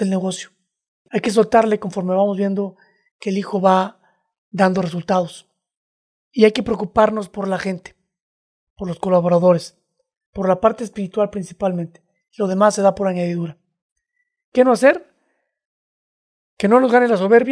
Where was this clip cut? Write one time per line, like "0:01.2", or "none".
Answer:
none